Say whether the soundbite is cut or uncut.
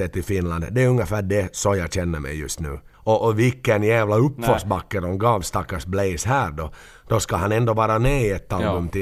cut